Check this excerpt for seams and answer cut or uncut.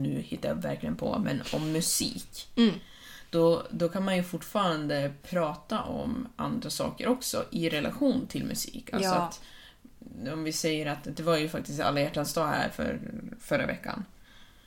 uncut